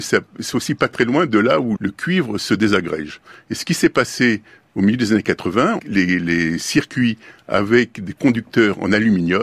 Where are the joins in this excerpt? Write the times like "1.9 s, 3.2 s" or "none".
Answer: 1.8 s, 5.8 s